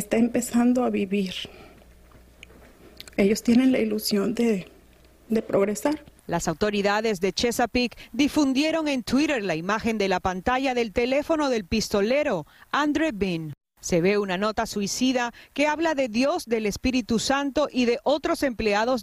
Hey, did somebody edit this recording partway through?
no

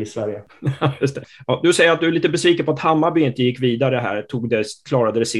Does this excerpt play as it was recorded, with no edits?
yes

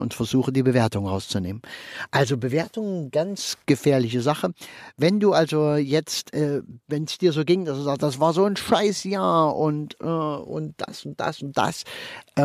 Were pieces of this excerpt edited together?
no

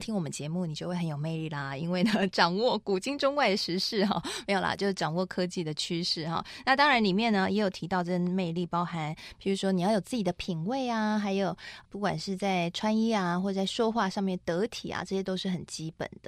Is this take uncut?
yes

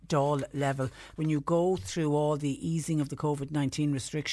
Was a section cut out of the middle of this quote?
yes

